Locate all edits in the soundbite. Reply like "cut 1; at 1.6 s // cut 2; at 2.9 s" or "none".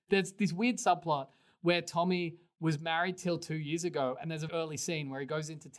cut 1; at 4.5 s